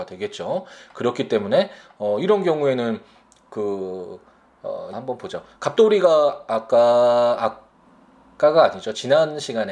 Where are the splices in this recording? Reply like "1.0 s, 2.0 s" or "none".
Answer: 4.9 s